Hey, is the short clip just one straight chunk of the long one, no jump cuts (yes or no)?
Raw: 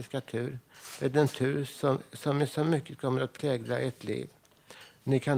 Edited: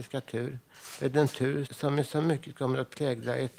no